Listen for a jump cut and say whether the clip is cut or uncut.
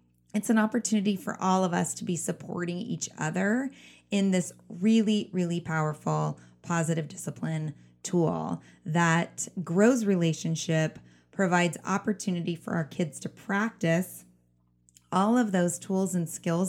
uncut